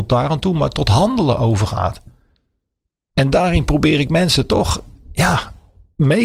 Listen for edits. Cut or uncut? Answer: uncut